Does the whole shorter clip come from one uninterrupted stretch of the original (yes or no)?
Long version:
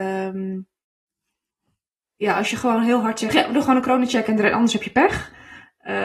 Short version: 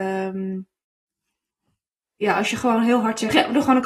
yes